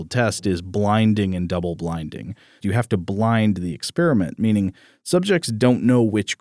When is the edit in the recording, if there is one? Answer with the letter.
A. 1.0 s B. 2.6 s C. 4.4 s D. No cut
B